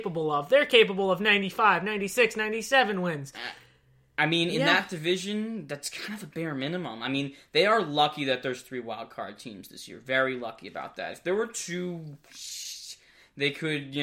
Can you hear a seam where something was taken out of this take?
no; 0 cuts

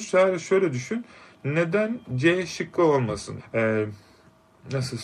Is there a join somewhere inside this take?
yes; 1 cut; at 3.4 s

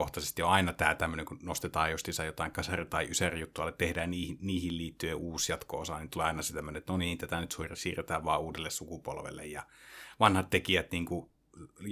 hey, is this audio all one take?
yes; 0 cuts

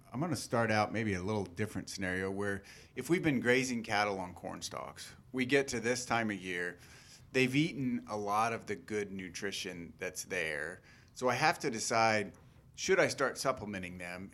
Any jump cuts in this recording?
no; 0 cuts

